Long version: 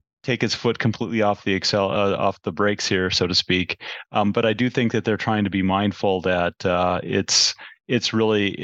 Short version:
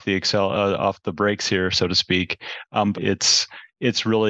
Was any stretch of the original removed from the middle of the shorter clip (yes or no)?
yes